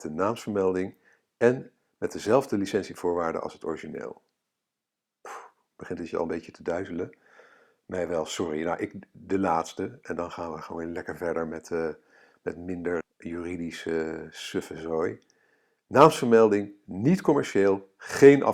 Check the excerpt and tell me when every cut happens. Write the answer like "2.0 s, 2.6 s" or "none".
13.0 s